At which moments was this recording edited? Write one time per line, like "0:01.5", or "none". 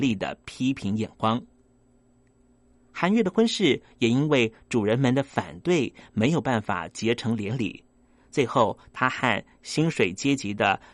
none